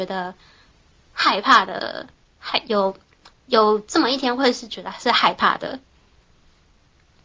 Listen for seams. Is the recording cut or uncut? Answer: uncut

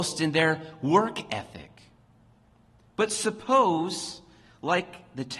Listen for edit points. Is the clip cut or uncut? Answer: uncut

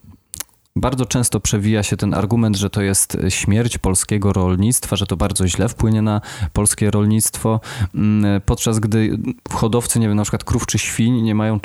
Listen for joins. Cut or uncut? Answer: uncut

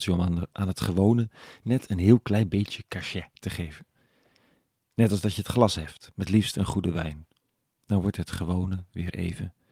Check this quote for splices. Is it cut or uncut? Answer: uncut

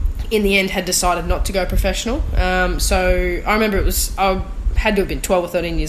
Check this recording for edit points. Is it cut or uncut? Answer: uncut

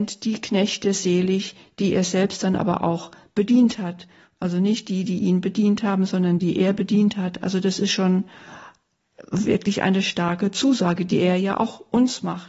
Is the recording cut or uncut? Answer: uncut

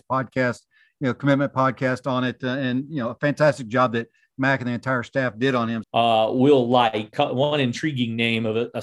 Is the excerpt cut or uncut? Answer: cut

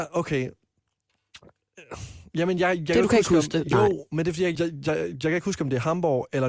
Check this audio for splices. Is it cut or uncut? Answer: cut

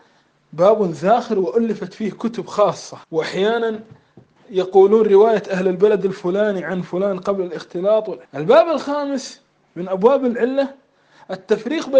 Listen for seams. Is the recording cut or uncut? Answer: cut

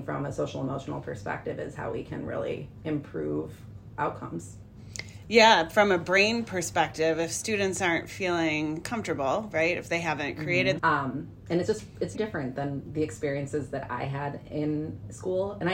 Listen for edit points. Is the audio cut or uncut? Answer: cut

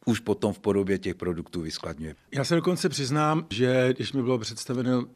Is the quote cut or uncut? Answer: cut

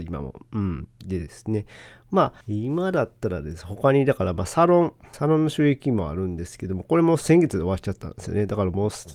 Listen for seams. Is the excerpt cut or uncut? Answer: cut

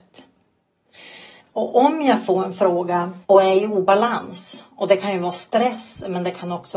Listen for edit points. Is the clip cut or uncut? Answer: cut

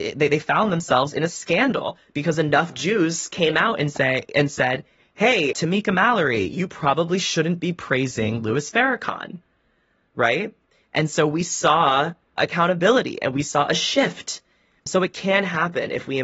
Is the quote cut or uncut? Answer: uncut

